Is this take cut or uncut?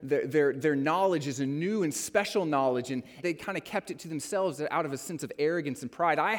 cut